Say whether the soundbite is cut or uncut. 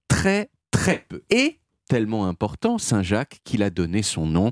cut